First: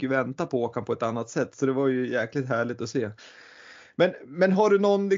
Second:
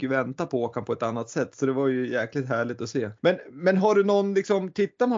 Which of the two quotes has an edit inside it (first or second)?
second